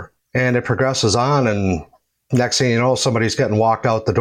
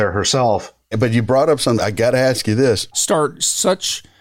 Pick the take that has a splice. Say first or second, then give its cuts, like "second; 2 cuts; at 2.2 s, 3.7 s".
second; 2 cuts; at 0.9 s, 2.9 s